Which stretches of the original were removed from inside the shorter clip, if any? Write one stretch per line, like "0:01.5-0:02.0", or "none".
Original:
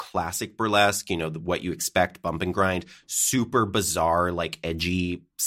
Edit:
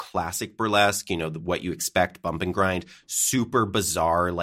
none